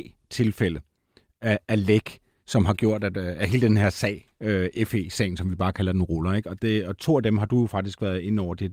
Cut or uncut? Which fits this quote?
uncut